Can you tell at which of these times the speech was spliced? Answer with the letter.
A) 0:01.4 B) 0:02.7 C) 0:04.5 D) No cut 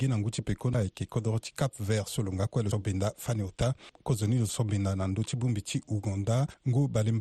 B